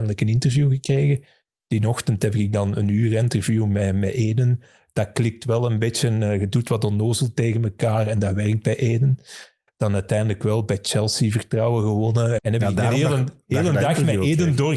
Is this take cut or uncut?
cut